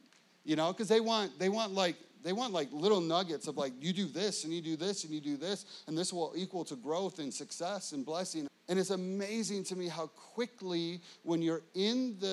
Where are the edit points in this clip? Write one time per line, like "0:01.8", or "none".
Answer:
0:08.5